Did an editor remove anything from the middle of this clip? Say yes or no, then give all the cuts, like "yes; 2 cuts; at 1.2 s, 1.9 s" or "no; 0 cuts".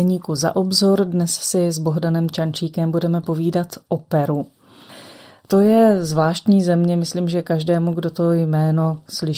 no; 0 cuts